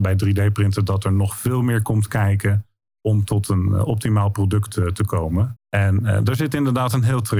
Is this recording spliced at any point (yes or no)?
yes